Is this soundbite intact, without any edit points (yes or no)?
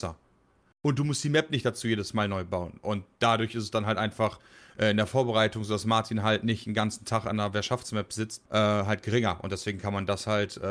no